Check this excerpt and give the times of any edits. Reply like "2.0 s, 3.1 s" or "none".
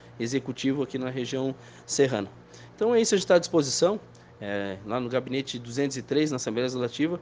none